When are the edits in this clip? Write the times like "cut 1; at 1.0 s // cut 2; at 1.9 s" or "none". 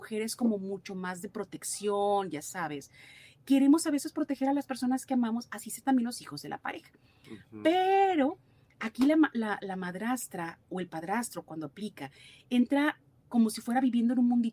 none